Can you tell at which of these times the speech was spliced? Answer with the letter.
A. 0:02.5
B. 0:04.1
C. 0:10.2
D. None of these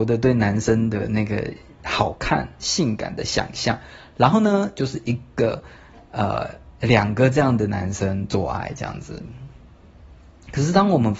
D